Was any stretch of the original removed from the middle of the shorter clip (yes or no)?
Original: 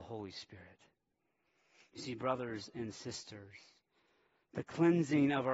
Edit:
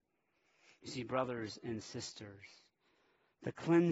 no